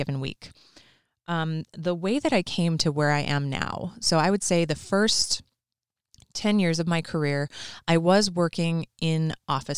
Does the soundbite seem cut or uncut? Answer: uncut